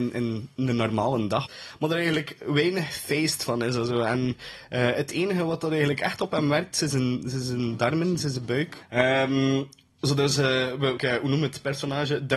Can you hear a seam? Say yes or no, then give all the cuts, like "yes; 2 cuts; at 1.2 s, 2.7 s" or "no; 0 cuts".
yes; 3 cuts; at 1.5 s, 8.8 s, 11.0 s